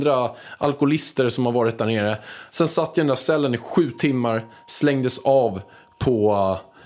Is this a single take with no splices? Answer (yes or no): yes